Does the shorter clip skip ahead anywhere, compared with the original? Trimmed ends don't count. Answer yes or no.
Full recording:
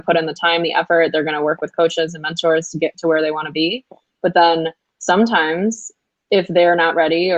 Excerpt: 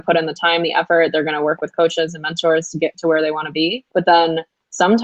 yes